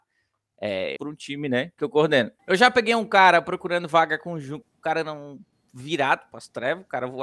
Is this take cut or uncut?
cut